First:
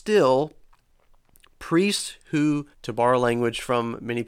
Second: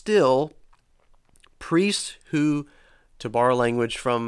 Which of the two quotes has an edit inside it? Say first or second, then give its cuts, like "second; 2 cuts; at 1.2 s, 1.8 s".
first; 1 cut; at 2.7 s